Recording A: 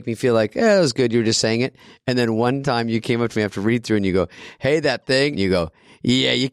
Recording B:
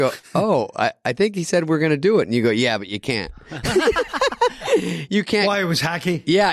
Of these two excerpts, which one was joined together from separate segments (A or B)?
A